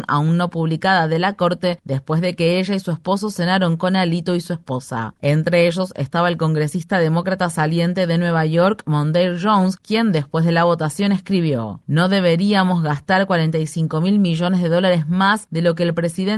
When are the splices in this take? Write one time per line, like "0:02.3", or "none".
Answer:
0:05.2